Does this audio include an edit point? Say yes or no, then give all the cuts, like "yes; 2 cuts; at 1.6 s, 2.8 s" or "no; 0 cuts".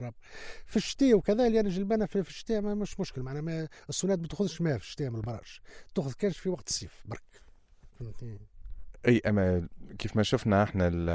yes; 1 cut; at 7.9 s